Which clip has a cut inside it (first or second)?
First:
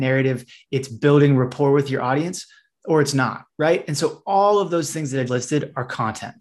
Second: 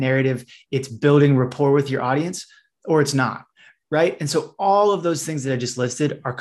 first